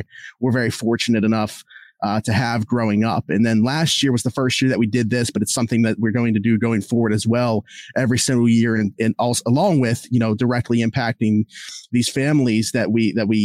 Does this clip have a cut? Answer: no; 0 cuts

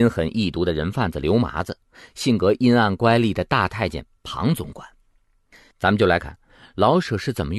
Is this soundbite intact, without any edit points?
no; 1 cut; at 6.2 s

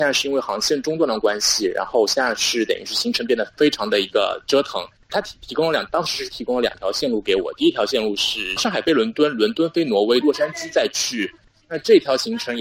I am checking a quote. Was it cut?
yes; 2 cuts; at 10.2 s, 11.6 s

